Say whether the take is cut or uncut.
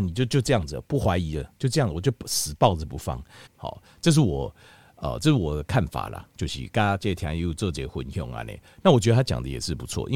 cut